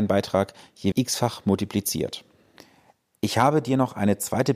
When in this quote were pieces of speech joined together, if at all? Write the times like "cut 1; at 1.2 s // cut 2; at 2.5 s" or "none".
cut 1; at 0.9 s